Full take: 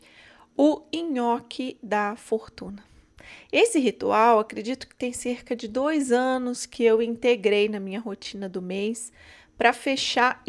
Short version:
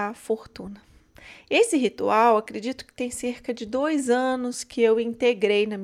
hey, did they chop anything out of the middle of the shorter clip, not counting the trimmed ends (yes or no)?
no